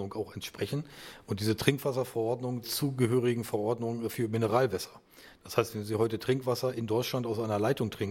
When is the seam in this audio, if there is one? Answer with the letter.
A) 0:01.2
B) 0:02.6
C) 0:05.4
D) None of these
B